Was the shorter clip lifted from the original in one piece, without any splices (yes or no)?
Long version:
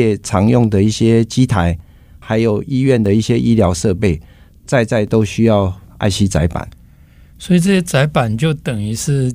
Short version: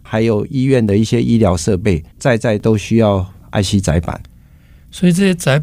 no